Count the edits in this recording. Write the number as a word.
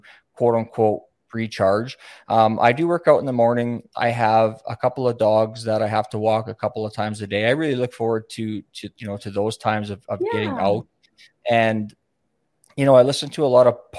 zero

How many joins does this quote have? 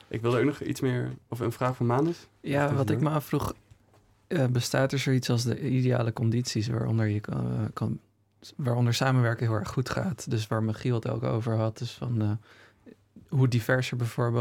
zero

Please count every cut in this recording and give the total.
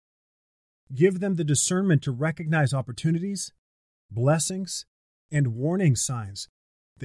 zero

